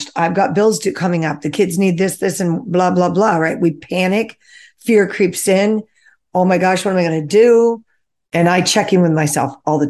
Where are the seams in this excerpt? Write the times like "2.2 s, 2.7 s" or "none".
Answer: 8.3 s